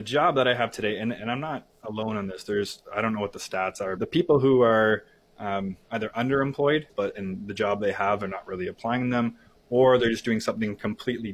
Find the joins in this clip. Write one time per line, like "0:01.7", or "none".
0:04.0
0:06.9